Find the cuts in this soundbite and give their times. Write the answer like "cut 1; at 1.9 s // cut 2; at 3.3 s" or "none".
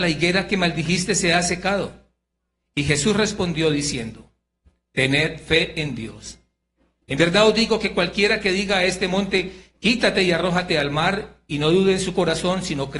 none